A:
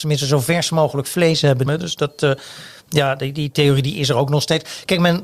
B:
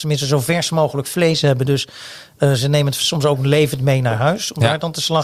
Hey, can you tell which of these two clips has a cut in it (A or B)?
A